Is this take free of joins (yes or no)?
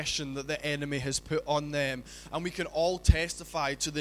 no